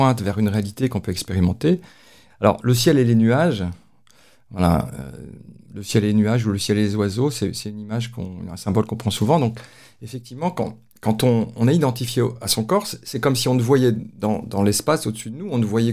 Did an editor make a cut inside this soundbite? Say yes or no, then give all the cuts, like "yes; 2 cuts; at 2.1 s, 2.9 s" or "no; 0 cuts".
yes; 1 cut; at 2.3 s